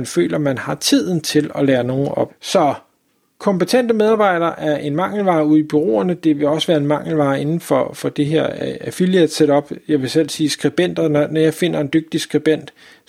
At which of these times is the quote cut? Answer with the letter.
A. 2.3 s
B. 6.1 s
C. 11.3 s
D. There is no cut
A